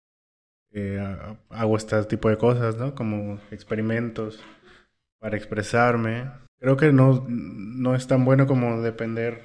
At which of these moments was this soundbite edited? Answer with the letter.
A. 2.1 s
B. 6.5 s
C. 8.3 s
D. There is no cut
B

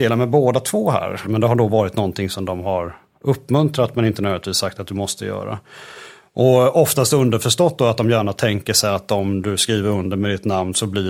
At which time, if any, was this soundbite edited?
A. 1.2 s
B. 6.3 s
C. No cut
A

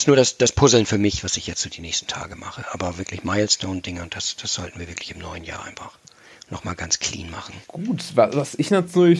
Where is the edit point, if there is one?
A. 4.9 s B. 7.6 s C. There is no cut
B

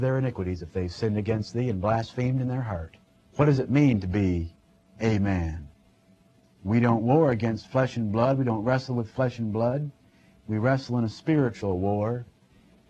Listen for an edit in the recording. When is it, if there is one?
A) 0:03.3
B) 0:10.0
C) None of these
A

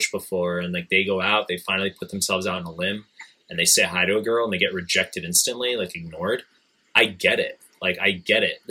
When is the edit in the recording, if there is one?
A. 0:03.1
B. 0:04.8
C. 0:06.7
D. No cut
D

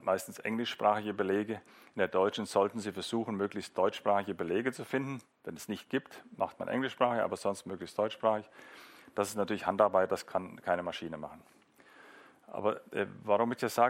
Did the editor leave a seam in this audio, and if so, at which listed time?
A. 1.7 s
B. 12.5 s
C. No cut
C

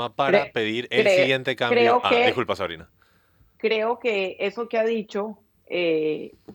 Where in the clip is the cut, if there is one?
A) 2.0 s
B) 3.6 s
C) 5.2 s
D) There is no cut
B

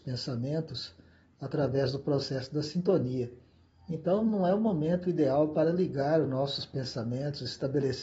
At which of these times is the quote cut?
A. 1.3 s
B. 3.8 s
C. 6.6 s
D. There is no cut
D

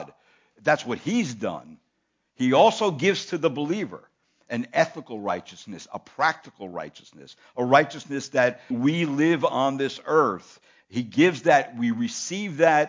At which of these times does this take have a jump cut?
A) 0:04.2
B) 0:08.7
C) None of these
B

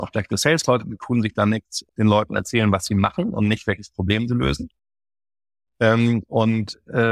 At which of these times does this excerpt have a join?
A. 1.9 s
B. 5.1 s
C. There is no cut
A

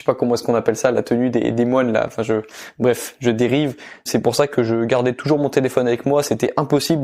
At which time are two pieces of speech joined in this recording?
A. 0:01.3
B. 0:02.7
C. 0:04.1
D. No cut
C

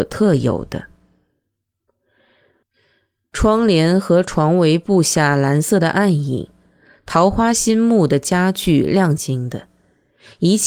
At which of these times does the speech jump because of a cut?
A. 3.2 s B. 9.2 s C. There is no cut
B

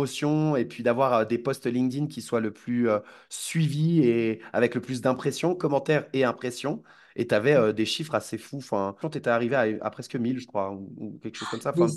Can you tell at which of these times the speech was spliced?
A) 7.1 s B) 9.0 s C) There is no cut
B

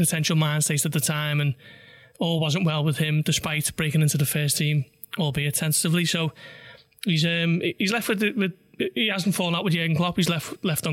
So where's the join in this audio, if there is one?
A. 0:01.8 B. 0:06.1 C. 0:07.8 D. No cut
D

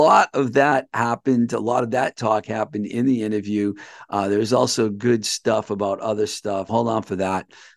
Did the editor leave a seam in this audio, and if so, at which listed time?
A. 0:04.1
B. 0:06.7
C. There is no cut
B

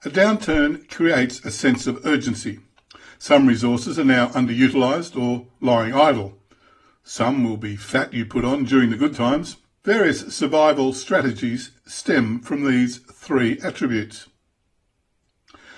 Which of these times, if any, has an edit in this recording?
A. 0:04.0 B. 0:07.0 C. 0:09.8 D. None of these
C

